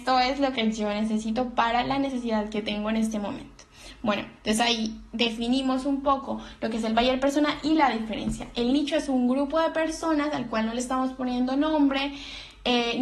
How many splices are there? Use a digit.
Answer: 0